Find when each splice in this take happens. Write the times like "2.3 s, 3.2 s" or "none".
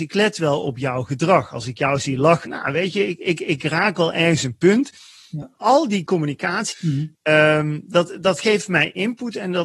2.5 s, 5.4 s, 6.7 s